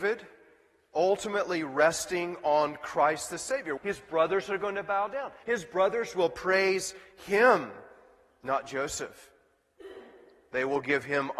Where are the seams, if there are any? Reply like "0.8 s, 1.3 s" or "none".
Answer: 3.8 s, 5.4 s